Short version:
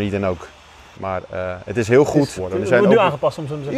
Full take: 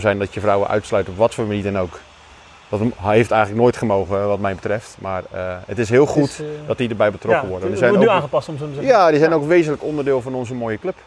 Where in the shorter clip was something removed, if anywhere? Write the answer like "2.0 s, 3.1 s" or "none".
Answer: 0.9 s, 2.4 s

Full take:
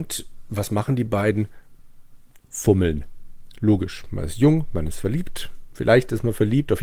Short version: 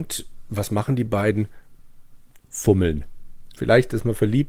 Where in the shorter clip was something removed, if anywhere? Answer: 3.5 s

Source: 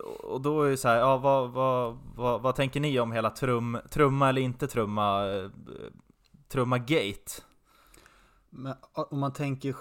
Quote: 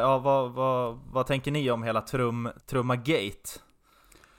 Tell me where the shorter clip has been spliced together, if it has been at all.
1.1 s, 2.6 s

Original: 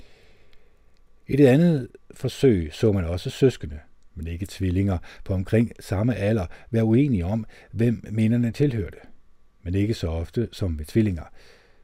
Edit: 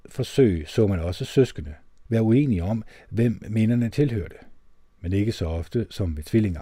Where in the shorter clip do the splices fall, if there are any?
2.0 s

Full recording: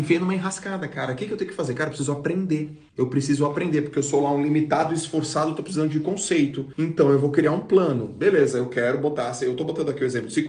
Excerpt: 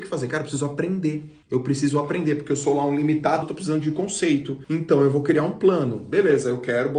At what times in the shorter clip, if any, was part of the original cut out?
3.4 s

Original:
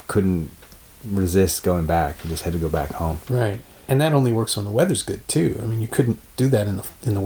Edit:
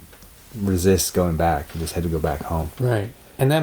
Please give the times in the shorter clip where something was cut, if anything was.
none

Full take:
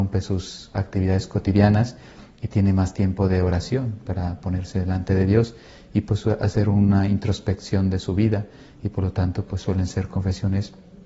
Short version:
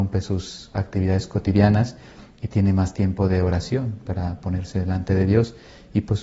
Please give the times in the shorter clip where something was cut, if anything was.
none

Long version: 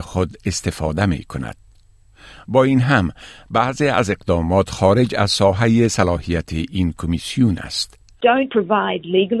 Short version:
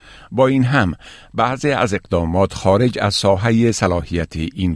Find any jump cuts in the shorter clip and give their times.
none

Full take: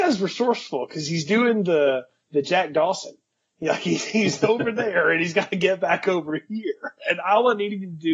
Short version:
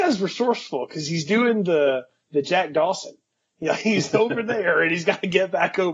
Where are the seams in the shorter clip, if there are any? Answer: 3.8 s

